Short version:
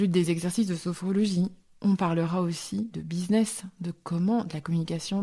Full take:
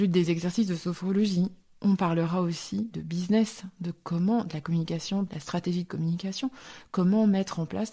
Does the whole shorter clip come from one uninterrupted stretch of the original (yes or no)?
yes